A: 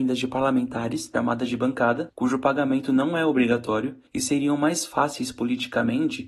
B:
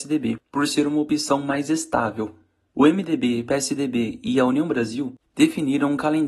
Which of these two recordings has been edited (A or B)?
A